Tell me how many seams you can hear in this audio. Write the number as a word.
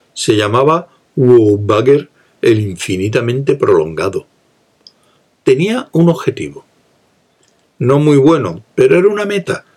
one